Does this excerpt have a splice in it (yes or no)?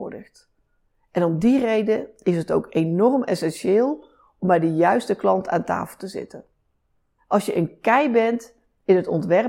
yes